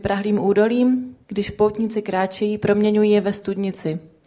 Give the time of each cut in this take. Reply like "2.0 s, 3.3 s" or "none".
1.2 s